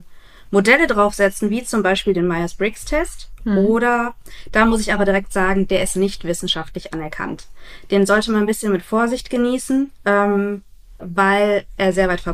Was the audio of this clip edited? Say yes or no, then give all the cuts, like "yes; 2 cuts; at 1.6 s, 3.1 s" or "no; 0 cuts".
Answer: yes; 1 cut; at 11.0 s